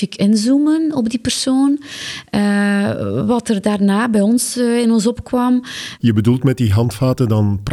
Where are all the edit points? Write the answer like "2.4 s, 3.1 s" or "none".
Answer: 2.3 s, 6.0 s